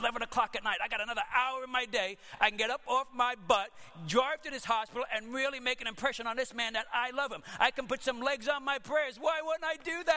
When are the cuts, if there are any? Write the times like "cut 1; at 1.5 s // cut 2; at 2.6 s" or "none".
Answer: none